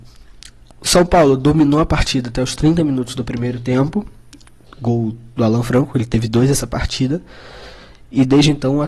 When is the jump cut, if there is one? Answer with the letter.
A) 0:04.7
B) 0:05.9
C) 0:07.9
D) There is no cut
A